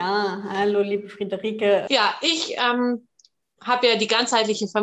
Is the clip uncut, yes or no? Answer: no